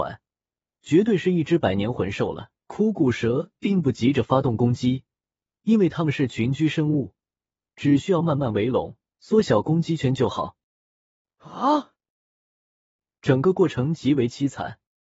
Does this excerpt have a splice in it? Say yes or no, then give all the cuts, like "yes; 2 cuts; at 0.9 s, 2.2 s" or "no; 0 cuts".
yes; 2 cuts; at 2.6 s, 13.1 s